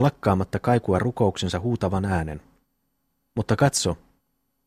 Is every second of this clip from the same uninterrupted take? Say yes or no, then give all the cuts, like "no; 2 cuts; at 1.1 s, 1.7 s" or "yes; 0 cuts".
no; 1 cut; at 3.2 s